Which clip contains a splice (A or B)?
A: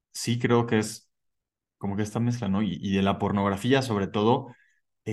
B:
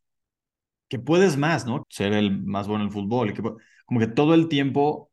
B